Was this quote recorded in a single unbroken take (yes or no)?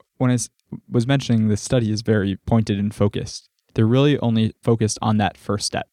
yes